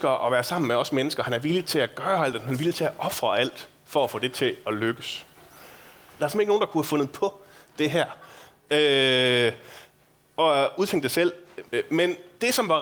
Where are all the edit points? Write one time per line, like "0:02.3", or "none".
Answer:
0:06.2
0:11.7